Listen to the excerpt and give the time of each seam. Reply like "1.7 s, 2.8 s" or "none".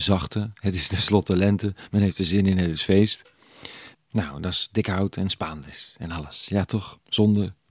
3.9 s